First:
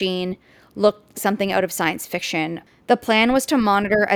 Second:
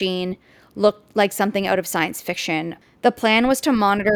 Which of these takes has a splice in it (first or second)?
first